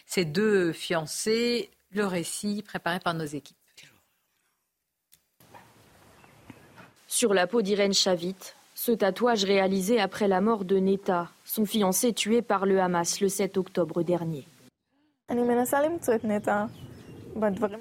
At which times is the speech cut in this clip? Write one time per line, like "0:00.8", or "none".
none